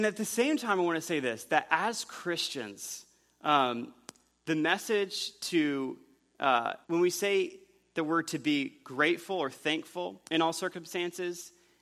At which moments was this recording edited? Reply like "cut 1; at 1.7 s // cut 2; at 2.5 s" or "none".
cut 1; at 6.8 s // cut 2; at 10.3 s